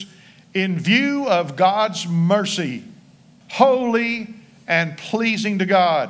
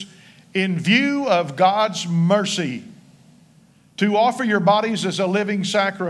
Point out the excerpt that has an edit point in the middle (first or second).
first